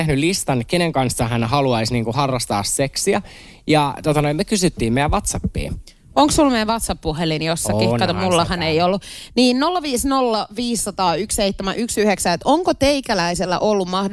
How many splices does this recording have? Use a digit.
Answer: 0